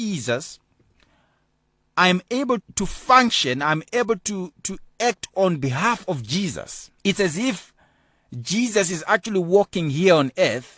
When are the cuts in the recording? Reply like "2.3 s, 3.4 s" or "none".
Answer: 2.6 s, 7.0 s